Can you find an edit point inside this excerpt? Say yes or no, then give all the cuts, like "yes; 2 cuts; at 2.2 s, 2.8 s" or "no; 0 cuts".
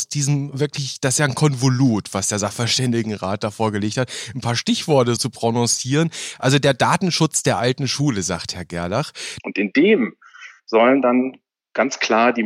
yes; 2 cuts; at 5.2 s, 9.4 s